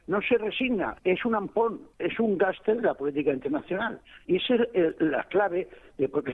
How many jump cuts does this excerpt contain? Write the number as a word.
two